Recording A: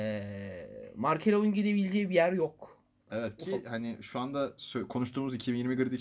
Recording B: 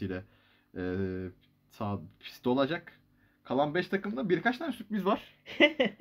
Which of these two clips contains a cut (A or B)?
A